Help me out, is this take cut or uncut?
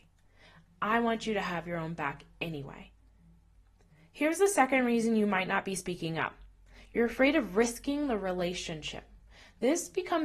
uncut